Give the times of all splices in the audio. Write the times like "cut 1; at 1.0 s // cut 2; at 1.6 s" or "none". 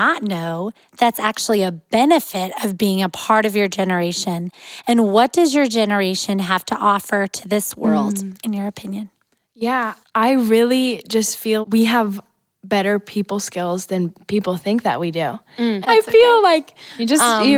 cut 1; at 10.0 s // cut 2; at 11.6 s // cut 3; at 15.8 s